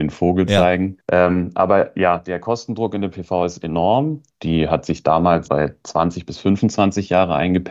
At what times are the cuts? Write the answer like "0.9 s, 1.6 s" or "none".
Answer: 1.0 s, 4.3 s, 5.4 s